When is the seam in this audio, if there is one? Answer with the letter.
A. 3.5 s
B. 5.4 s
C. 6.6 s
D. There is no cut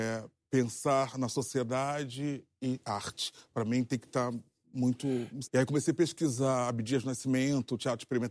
B